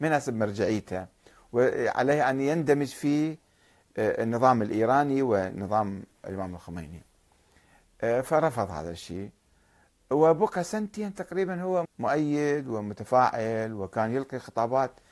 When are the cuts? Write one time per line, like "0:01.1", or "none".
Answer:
0:11.8

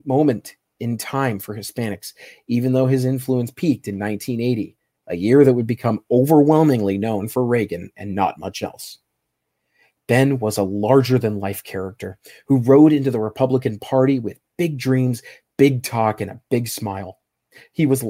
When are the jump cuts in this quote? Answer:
none

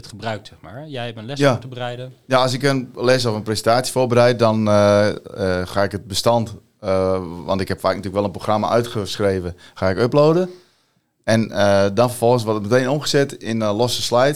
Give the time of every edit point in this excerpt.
none

